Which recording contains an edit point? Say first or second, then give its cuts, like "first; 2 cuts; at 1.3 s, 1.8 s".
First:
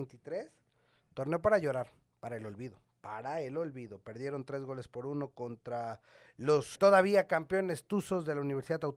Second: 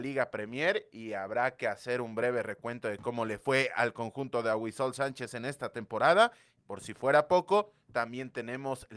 first; 1 cut; at 6.7 s